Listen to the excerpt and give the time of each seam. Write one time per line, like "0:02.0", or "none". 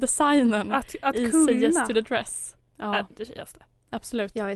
0:02.6

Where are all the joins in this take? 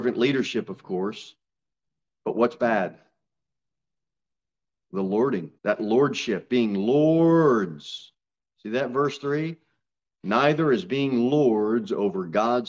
0:05.6

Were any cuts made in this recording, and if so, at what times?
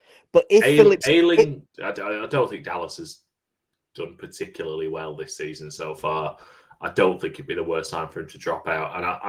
0:01.7

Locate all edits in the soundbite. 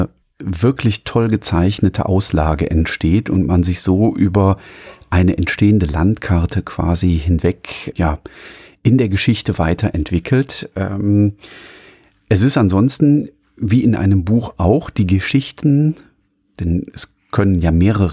0:07.9

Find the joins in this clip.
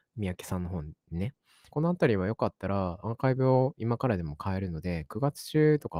0:01.7
0:03.0

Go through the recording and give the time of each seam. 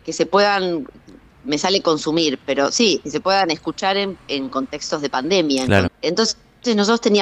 0:05.9

